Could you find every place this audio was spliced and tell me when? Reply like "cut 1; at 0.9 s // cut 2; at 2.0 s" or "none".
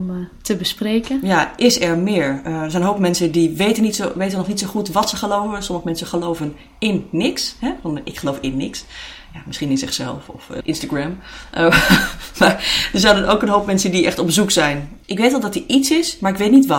cut 1; at 10.6 s // cut 2; at 15.0 s